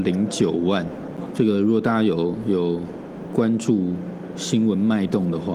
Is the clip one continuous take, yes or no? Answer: no